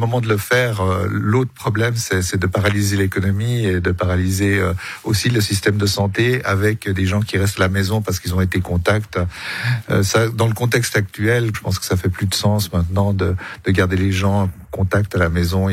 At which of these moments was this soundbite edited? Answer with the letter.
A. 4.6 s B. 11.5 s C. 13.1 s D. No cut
B